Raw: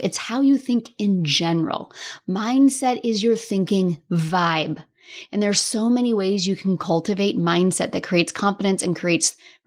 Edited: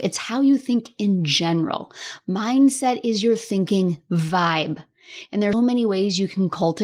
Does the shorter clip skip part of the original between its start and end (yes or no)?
yes